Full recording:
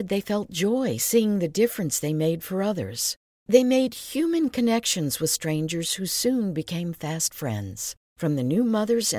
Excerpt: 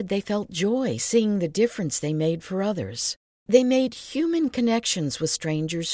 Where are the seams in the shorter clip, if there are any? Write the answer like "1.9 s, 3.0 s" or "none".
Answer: none